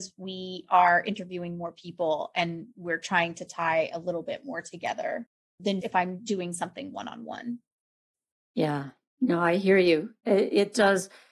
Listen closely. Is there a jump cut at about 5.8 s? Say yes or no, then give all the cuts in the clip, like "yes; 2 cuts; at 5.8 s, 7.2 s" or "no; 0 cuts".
yes; 1 cut; at 5.8 s